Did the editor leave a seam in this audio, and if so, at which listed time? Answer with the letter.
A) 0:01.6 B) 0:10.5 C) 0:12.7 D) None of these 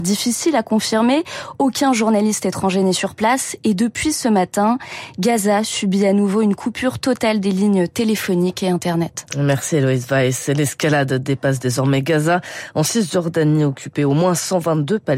D